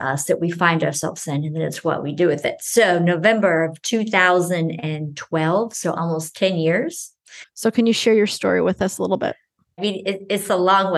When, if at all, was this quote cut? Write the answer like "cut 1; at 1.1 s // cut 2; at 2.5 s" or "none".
cut 1; at 7.4 s // cut 2; at 9.8 s